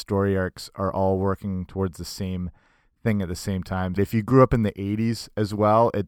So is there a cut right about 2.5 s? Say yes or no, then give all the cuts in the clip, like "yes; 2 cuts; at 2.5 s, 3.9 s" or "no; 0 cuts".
no; 1 cut; at 4.0 s